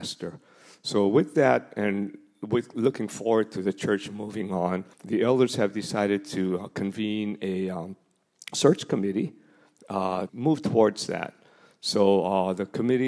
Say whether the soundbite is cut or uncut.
cut